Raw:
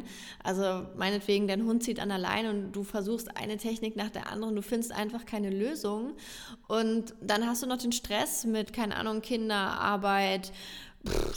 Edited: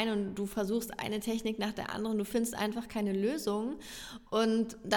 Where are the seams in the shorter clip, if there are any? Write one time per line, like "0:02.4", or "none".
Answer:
none